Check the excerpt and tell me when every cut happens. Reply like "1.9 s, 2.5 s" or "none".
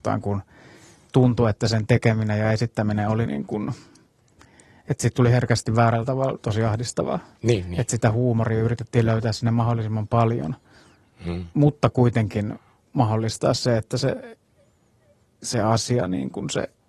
3.3 s